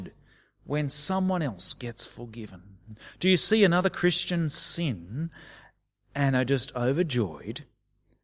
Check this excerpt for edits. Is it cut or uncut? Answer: uncut